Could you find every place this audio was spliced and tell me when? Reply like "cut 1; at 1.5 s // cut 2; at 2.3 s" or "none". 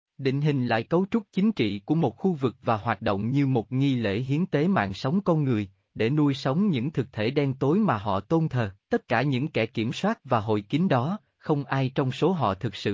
cut 1; at 8.8 s // cut 2; at 11.3 s

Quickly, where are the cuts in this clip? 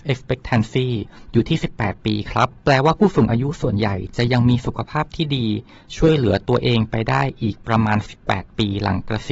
cut 1; at 2.6 s

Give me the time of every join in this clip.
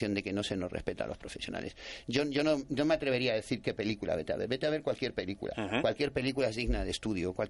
none

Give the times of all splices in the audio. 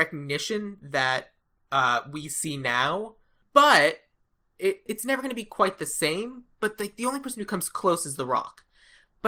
cut 1; at 4.9 s

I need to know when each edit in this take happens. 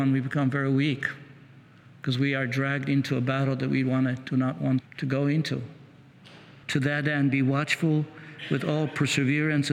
cut 1; at 4.8 s // cut 2; at 6.6 s

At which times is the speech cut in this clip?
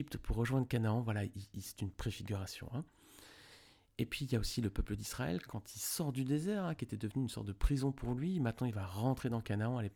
cut 1; at 1.6 s

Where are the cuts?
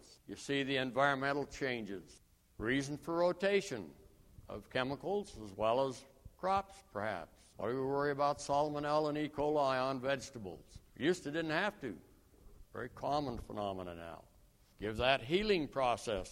cut 1; at 7.5 s // cut 2; at 12.7 s // cut 3; at 14.7 s

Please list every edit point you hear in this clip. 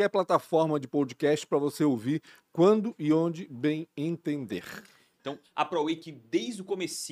cut 1; at 5.1 s

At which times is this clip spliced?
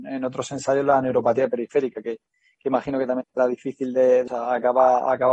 cut 1; at 4.3 s

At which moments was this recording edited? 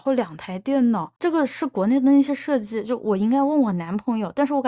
cut 1; at 1.2 s

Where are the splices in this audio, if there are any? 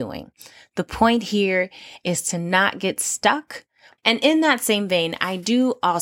cut 1; at 4.0 s

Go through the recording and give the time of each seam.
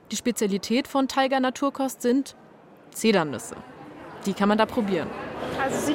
none

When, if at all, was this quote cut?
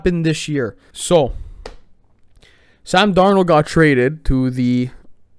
cut 1; at 0.9 s

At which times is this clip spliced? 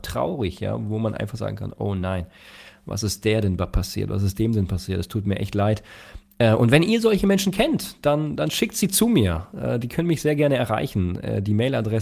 none

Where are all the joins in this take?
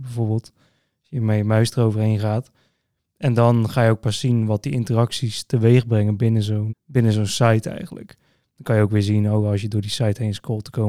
cut 1; at 6.7 s

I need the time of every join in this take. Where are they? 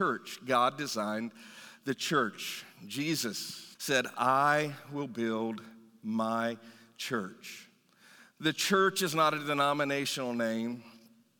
cut 1; at 3.8 s

